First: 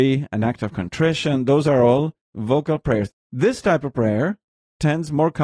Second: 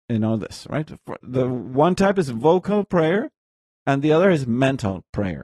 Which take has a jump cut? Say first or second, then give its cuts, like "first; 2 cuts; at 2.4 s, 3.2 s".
first; 1 cut; at 3.1 s